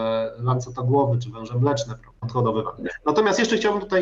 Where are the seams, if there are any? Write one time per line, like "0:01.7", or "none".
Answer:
0:02.2